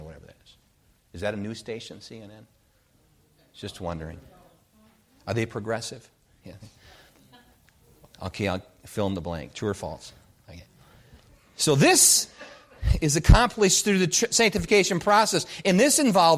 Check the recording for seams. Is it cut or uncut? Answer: uncut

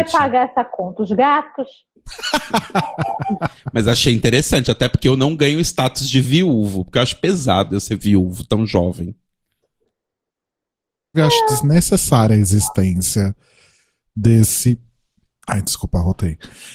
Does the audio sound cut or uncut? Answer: cut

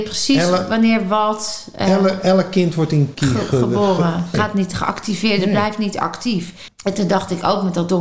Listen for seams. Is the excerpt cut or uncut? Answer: cut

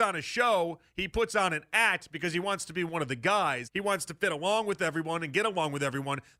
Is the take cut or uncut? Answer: cut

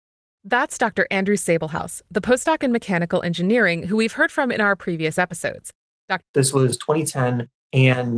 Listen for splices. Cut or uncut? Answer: cut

